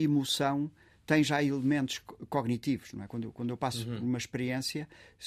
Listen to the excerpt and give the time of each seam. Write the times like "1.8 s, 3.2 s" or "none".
none